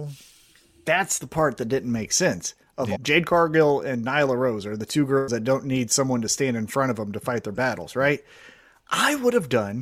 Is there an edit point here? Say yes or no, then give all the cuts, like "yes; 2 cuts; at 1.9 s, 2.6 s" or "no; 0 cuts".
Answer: yes; 1 cut; at 2.9 s